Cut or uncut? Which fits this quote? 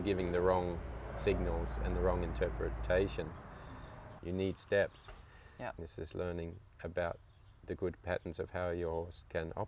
cut